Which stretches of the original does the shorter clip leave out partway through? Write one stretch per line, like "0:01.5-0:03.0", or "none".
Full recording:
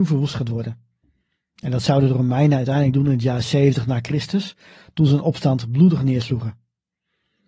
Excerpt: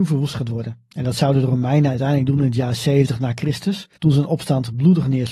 0:00.9-0:01.6
0:04.6-0:04.9